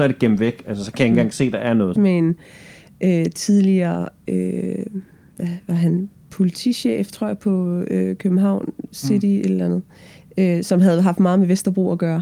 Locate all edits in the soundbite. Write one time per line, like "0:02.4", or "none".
0:02.0